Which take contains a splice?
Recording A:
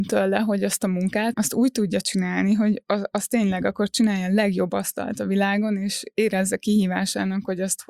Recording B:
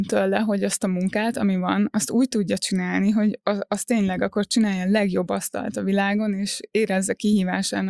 A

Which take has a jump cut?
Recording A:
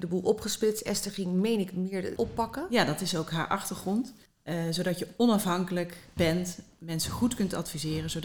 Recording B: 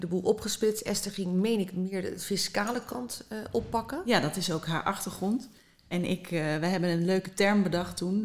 A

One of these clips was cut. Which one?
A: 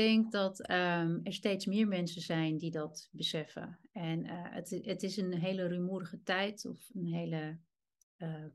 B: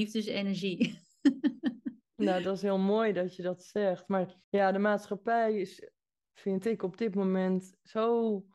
B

